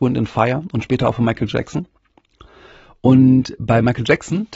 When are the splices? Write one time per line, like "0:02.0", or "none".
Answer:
none